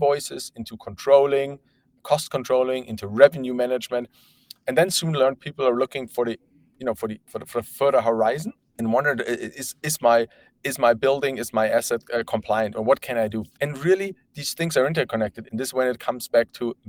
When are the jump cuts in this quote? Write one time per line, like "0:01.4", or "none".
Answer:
0:13.5
0:15.5